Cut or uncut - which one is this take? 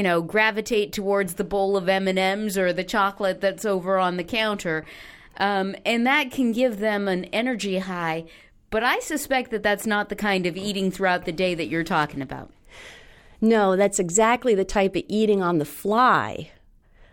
uncut